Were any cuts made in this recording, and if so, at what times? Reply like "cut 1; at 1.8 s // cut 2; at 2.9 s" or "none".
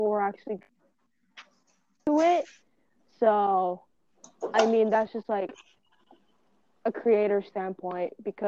none